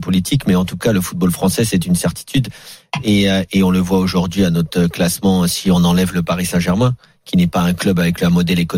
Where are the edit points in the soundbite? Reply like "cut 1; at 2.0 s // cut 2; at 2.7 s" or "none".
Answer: none